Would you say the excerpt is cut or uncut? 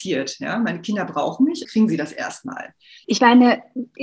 cut